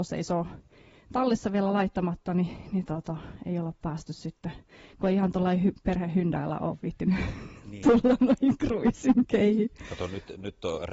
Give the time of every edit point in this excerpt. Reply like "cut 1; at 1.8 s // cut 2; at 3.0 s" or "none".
none